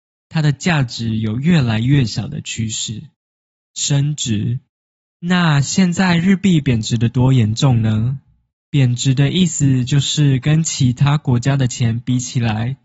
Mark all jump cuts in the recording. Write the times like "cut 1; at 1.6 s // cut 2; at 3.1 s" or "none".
cut 1; at 3.5 s // cut 2; at 5.1 s // cut 3; at 8.5 s